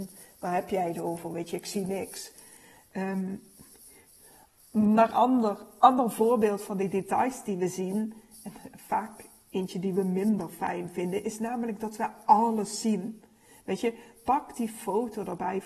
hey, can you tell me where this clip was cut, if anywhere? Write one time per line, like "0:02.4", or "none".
none